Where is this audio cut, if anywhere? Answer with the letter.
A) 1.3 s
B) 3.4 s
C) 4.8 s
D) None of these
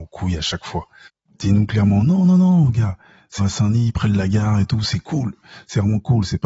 B